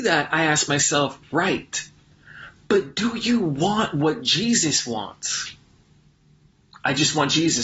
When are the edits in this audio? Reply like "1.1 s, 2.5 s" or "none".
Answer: none